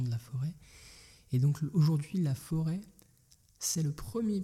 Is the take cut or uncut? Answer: uncut